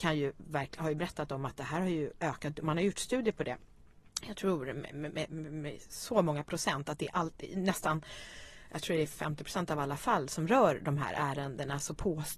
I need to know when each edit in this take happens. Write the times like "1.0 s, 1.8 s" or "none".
none